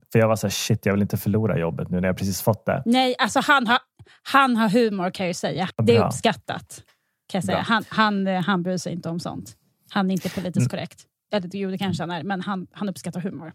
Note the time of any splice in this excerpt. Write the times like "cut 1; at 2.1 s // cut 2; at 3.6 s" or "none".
none